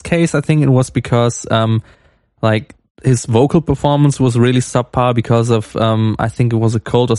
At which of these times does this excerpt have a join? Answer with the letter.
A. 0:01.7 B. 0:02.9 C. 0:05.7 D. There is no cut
D